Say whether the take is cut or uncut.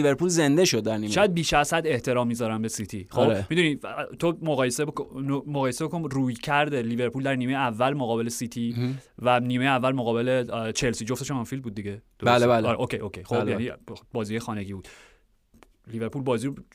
uncut